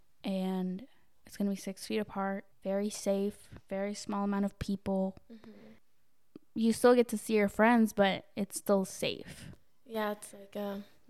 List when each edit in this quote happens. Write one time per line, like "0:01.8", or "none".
0:02.5